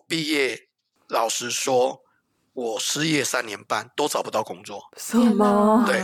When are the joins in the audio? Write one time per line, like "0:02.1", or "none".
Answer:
none